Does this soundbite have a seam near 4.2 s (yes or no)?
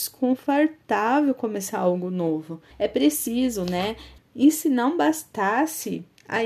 yes